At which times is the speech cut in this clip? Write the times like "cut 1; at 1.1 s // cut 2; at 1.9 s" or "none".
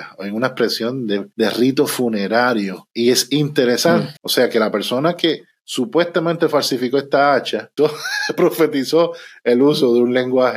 cut 1; at 4.2 s // cut 2; at 7.8 s